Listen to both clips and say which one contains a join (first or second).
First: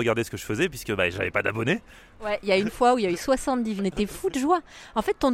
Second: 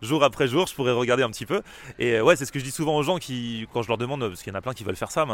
first